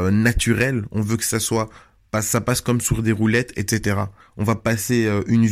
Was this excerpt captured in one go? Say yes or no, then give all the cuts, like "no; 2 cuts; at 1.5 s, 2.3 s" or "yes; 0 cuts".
no; 1 cut; at 4.2 s